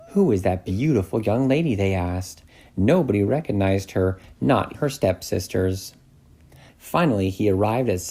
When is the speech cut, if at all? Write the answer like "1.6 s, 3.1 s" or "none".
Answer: 4.7 s, 6.7 s